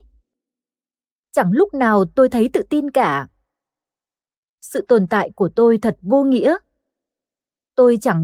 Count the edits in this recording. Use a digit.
0